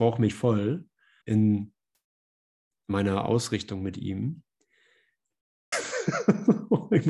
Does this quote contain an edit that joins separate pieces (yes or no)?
yes